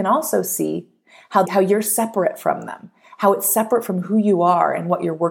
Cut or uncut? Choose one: cut